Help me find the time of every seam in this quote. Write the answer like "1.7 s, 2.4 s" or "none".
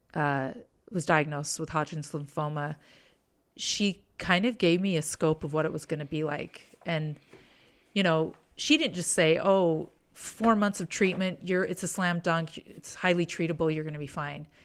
none